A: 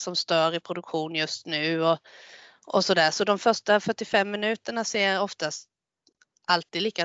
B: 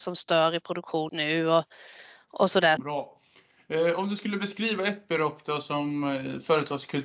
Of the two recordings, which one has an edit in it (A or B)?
B